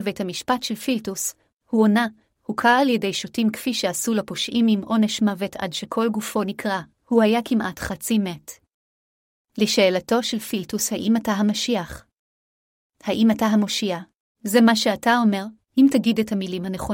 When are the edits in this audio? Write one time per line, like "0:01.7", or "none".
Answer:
0:06.9
0:14.4
0:15.6